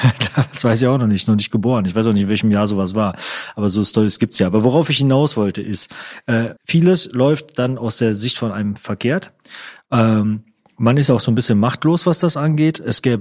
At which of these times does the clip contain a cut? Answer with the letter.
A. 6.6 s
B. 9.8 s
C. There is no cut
A